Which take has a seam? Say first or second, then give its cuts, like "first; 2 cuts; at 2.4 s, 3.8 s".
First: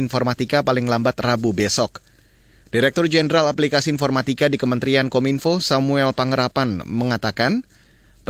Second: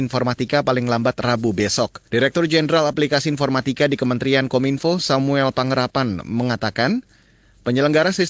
second; 1 cut; at 2.1 s